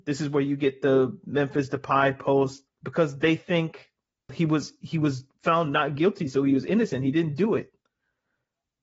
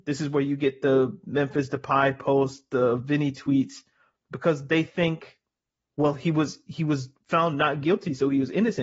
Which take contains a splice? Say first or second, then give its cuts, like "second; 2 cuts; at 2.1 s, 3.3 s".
first; 2 cuts; at 2.7 s, 4.3 s